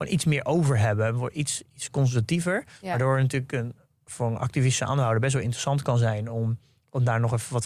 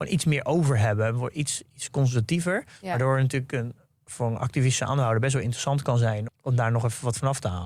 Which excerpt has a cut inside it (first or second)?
second